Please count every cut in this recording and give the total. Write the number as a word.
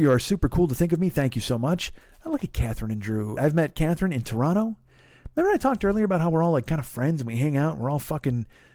one